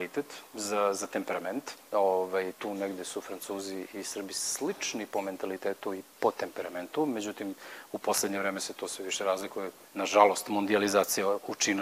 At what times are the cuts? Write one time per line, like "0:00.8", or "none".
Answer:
0:02.5
0:09.8